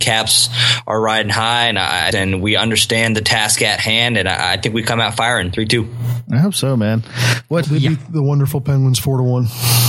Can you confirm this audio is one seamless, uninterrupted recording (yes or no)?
no